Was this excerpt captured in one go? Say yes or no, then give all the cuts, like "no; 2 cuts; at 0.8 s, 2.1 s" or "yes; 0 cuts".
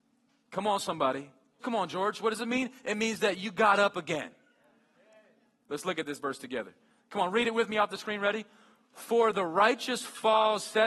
no; 2 cuts; at 1.6 s, 5.7 s